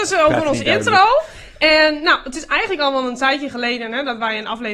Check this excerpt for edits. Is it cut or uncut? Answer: uncut